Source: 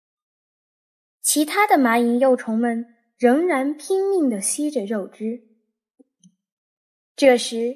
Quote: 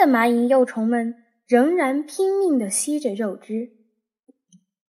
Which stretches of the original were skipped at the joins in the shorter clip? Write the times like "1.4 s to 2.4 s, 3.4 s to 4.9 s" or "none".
none